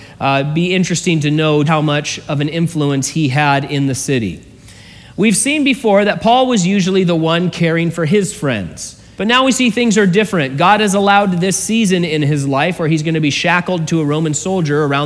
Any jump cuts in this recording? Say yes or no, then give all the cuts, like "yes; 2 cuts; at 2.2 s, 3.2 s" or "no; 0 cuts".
yes; 2 cuts; at 1.7 s, 9.2 s